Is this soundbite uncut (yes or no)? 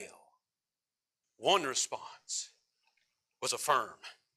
no